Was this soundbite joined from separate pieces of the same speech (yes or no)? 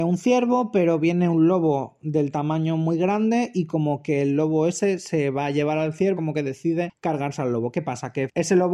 yes